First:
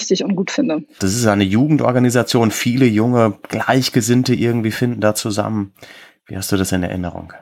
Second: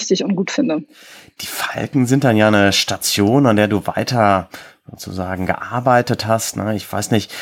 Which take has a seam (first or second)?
first